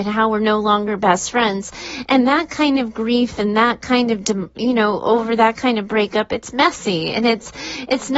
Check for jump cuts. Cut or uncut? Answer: uncut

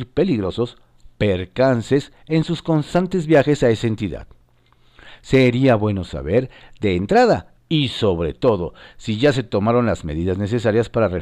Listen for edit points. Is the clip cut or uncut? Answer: cut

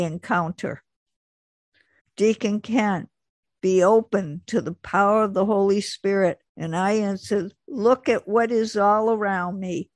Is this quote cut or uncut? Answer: cut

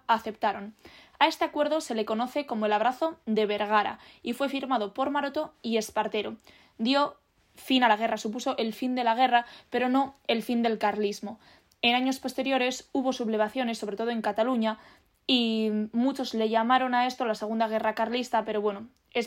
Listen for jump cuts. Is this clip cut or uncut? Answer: uncut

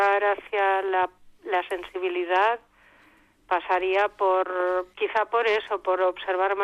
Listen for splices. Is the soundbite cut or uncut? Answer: cut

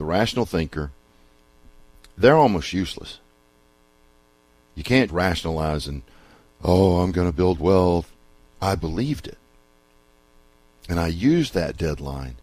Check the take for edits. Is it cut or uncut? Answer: cut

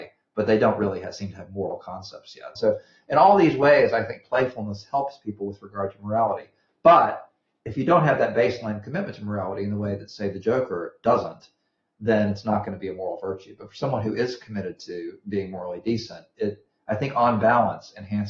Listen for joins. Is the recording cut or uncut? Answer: cut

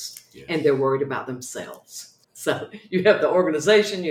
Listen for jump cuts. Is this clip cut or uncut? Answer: cut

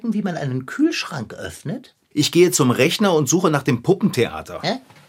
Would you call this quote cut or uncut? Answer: cut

